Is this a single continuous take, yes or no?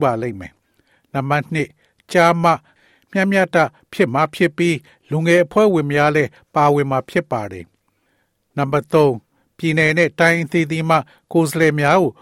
no